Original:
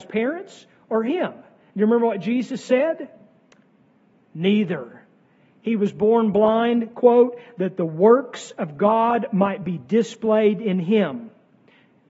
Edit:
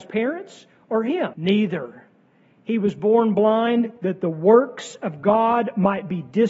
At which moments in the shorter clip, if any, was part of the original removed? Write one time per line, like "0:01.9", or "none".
0:01.3
0:04.0